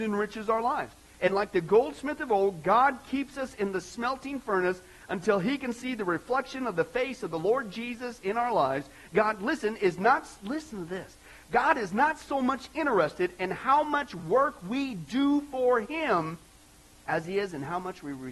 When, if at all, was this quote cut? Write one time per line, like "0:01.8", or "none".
none